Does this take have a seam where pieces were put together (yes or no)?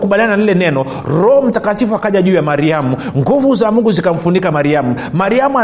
no